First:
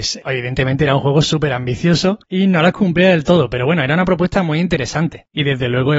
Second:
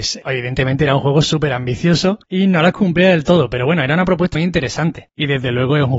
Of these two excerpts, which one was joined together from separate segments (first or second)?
second